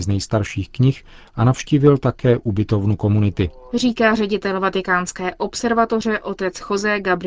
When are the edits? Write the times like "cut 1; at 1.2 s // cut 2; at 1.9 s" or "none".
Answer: cut 1; at 3.7 s